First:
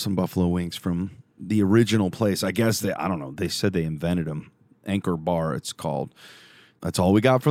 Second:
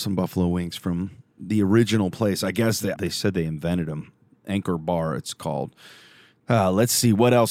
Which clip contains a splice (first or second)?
second